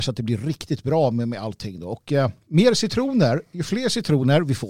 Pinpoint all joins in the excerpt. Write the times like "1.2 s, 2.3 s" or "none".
none